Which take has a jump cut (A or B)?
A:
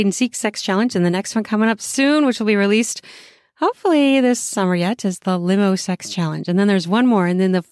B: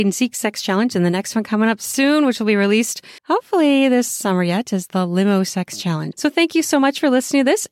B